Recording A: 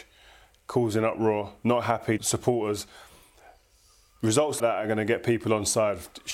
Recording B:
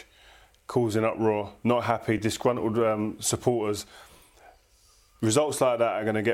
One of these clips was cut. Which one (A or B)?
A